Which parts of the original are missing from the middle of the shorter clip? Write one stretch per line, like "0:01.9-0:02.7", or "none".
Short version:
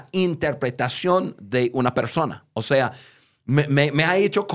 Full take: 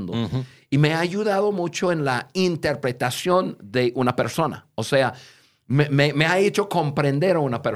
none